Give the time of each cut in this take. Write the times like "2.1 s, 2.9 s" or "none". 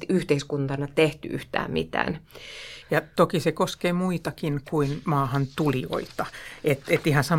2.8 s